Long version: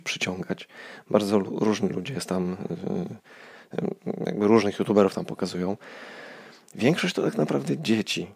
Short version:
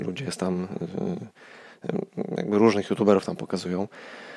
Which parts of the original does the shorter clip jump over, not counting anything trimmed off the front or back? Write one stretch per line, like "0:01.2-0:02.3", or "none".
none